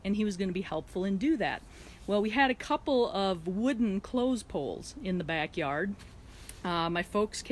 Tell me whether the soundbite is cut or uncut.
uncut